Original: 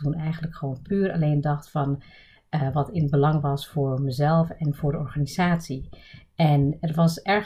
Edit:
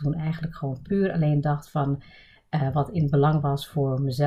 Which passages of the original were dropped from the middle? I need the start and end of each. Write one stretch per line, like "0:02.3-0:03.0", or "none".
none